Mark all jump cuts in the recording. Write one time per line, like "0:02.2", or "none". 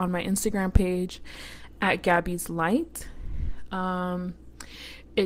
none